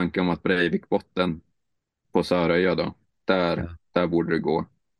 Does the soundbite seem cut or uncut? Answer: cut